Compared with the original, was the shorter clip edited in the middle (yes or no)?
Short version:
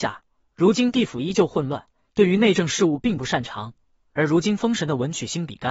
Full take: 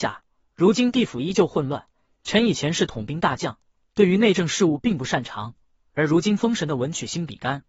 yes